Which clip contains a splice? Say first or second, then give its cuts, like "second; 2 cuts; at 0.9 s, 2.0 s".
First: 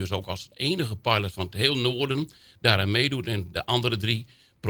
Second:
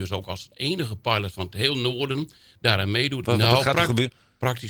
second; 1 cut; at 3.2 s